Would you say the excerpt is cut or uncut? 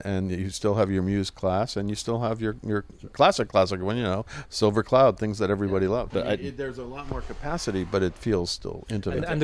cut